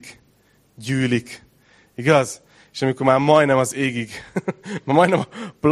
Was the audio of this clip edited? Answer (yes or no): no